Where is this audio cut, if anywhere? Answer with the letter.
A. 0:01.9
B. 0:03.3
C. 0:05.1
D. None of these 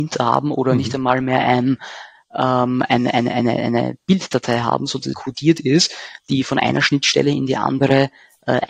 C